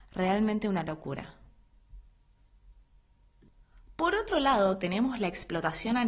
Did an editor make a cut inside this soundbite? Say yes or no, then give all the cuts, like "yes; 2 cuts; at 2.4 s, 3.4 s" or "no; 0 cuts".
no; 0 cuts